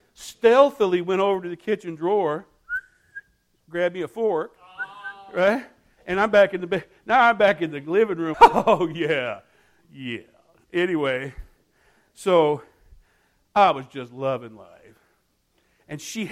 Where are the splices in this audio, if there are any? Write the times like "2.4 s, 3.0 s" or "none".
8.3 s